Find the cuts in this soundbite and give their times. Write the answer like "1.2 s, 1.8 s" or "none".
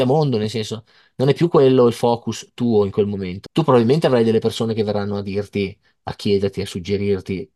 3.5 s

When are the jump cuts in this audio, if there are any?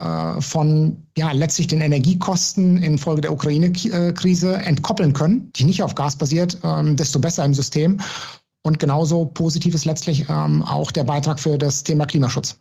5.5 s

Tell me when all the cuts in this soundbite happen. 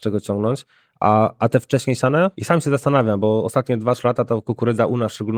2.3 s

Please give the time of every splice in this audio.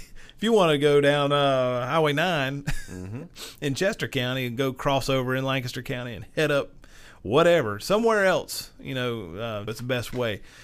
9.7 s

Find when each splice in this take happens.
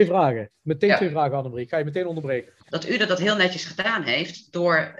2.7 s

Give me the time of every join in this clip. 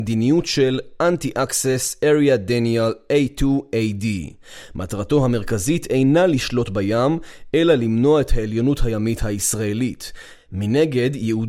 none

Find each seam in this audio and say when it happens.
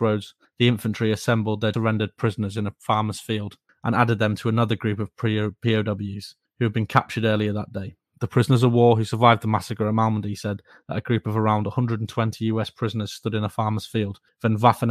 1.7 s

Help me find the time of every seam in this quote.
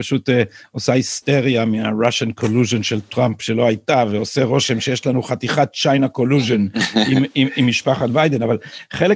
none

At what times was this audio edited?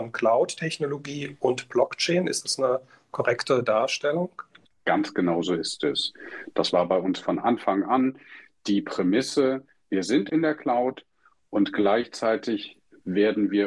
none

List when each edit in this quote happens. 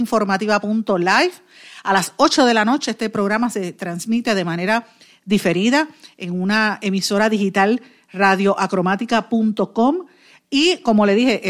none

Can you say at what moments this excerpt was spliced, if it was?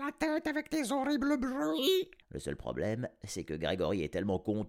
2.2 s

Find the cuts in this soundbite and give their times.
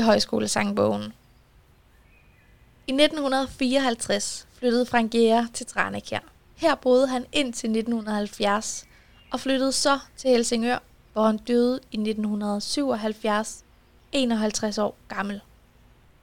none

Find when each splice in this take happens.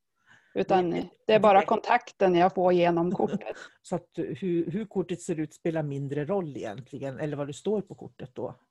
3.7 s

